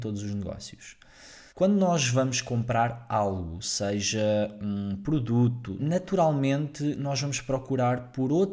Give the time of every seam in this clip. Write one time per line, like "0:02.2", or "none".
0:01.5
0:03.6
0:05.8

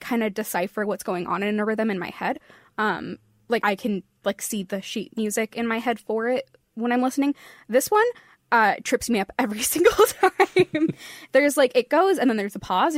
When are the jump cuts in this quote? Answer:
0:03.6

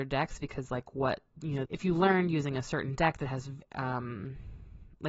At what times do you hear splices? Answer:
0:01.7
0:03.6

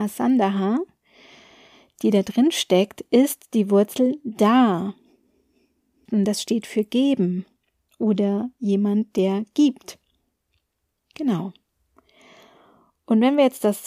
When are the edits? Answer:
none

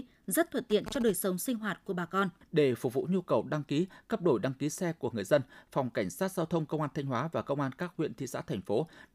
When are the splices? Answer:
0:02.4

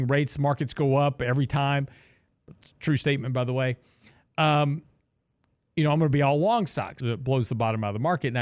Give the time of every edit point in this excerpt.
0:07.0

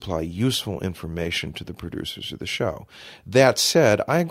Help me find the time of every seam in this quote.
none

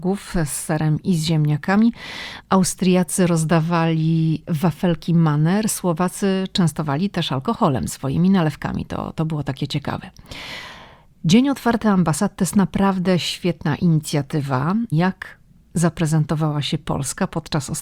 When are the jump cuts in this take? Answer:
0:02.4
0:14.9

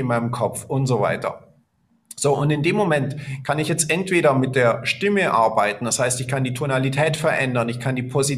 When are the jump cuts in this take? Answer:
none

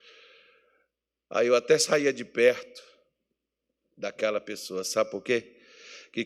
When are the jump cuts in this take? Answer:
none

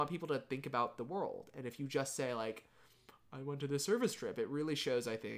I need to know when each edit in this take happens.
none

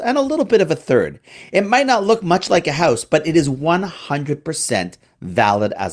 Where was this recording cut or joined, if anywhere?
none

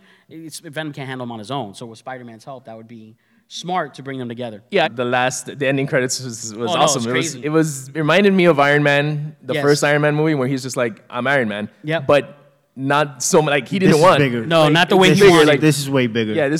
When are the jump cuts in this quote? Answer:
0:04.8
0:07.4

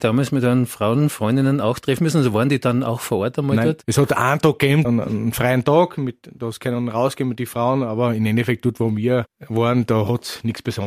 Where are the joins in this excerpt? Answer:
0:04.8

